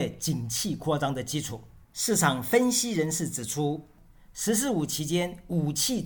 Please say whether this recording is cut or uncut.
cut